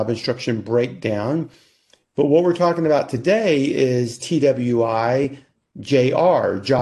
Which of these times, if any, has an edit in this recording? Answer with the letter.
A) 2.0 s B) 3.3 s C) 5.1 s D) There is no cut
D